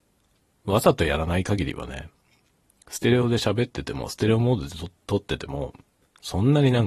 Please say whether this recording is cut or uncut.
uncut